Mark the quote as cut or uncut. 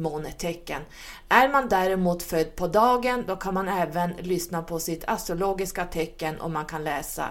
uncut